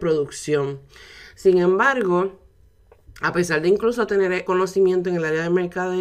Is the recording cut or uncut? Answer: cut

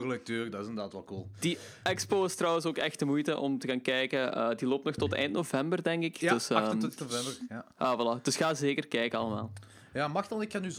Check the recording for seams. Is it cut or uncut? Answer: uncut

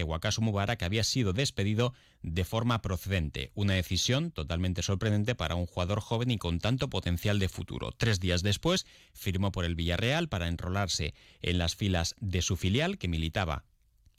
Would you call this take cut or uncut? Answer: uncut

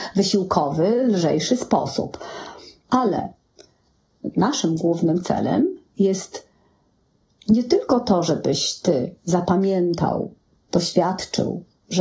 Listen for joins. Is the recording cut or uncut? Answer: cut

